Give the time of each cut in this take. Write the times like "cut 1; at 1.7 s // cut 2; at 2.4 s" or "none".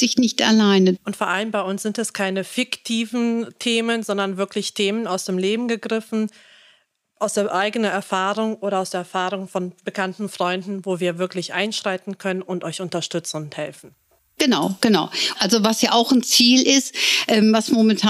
cut 1; at 1.0 s // cut 2; at 15.3 s